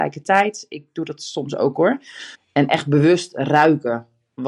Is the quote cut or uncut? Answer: cut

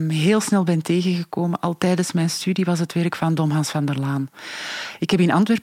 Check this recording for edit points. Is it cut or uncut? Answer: uncut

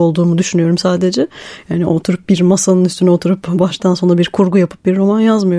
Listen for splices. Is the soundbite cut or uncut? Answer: uncut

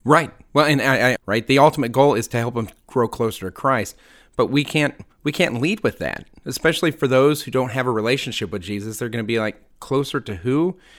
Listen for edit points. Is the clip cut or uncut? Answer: cut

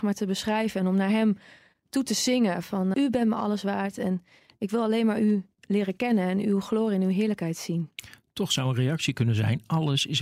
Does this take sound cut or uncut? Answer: cut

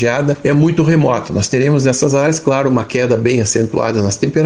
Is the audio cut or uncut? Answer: uncut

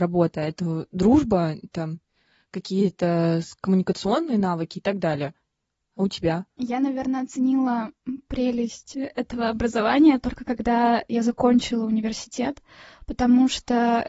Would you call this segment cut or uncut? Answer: uncut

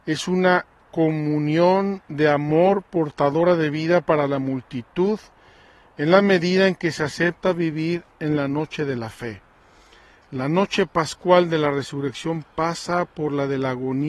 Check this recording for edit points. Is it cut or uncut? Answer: uncut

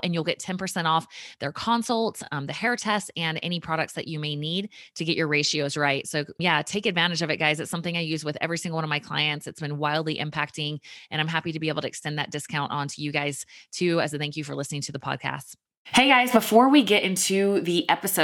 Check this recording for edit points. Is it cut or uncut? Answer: uncut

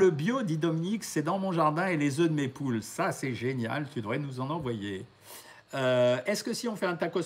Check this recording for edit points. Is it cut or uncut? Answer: uncut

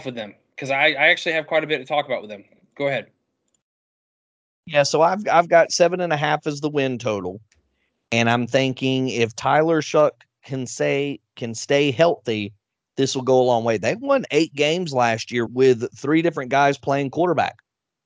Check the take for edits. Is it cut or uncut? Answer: cut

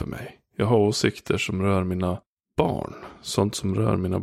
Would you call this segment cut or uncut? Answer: uncut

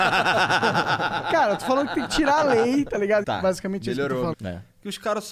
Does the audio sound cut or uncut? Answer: cut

